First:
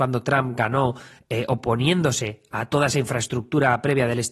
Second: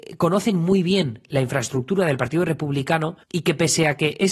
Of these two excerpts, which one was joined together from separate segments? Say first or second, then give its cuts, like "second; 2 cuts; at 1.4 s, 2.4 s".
second; 1 cut; at 3.2 s